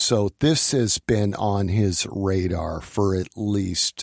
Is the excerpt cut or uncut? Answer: uncut